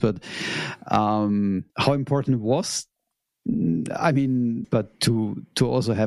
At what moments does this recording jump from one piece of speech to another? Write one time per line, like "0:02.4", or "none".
0:01.7
0:04.6